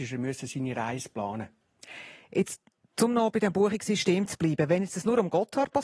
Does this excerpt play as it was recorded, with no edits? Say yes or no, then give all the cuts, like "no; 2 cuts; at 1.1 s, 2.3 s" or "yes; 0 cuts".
yes; 0 cuts